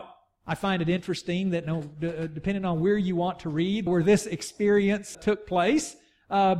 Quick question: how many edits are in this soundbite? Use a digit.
2